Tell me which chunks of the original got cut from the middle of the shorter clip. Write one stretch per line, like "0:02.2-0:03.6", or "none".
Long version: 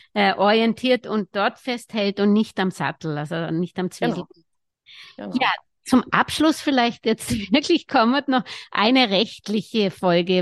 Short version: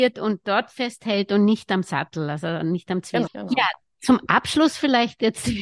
0:04.1-0:05.1